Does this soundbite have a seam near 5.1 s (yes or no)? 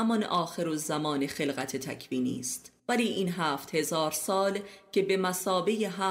no